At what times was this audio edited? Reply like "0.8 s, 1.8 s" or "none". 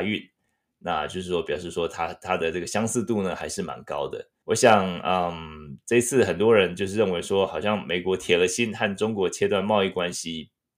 4.4 s